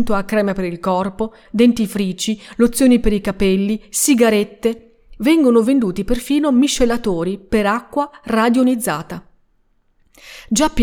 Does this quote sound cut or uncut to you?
cut